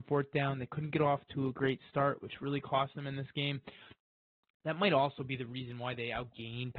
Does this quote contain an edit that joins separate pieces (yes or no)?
no